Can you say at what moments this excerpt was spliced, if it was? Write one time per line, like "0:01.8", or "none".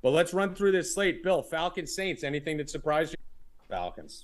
0:03.1